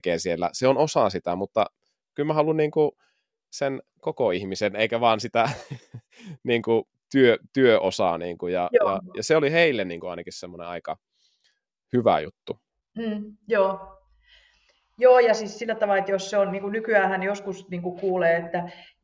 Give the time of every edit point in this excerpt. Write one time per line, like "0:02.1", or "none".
none